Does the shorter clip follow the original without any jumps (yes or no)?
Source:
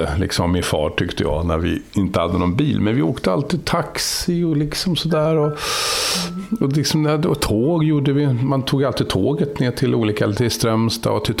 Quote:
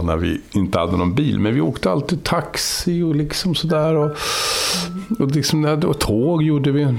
yes